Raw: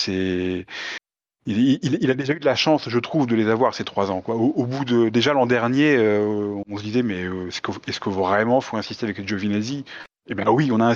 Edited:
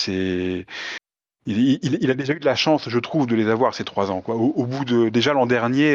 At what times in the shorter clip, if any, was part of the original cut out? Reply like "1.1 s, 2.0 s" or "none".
none